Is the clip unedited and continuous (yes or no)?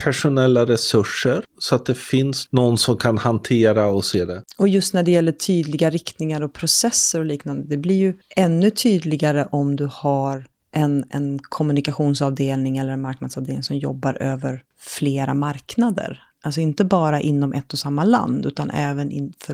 yes